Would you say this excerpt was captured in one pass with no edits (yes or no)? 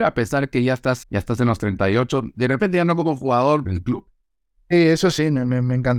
no